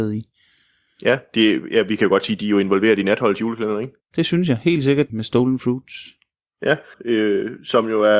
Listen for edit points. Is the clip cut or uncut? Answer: cut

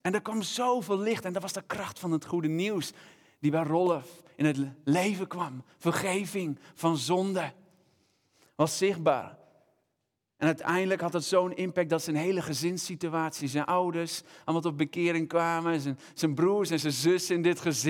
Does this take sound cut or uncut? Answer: uncut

